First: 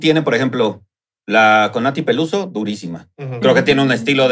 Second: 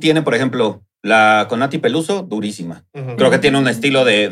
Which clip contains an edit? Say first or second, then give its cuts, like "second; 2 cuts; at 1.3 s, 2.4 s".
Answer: second; 1 cut; at 0.9 s